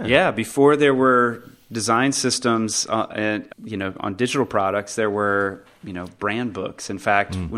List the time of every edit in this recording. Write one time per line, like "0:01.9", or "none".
0:03.5

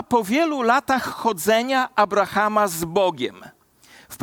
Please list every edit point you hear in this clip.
none

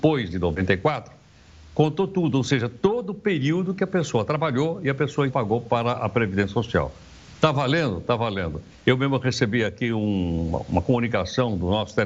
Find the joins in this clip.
0:05.3
0:08.7

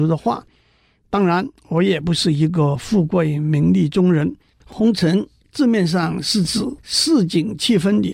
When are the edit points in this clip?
0:04.5

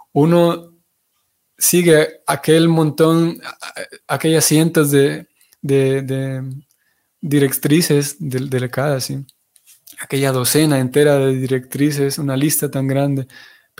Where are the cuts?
none

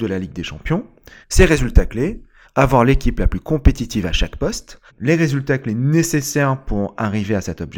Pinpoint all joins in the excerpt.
0:01.2
0:02.4
0:04.9

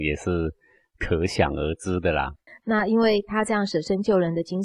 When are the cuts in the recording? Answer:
0:02.5

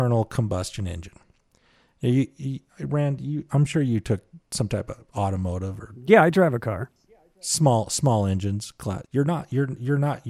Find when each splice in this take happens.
0:04.4
0:09.0

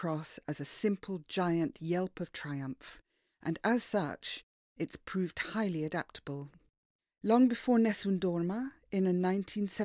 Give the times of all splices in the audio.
none

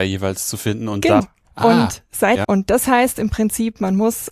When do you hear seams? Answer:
0:01.2
0:02.4

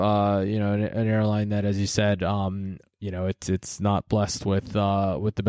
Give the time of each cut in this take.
none

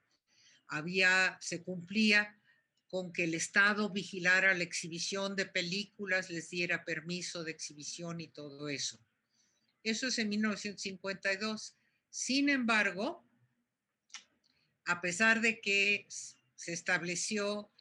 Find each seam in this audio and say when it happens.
0:09.7

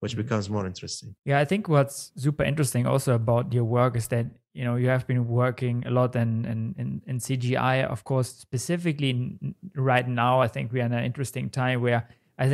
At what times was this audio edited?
none

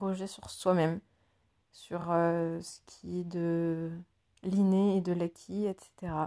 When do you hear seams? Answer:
none

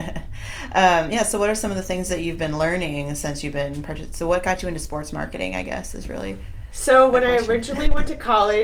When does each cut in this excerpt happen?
none

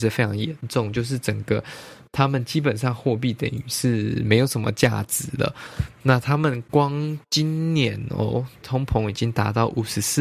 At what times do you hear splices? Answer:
0:07.2
0:08.6

